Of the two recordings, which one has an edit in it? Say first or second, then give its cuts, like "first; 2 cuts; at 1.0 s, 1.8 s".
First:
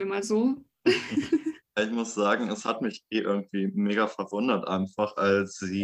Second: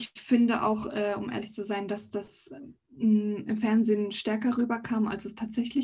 first; 1 cut; at 1.6 s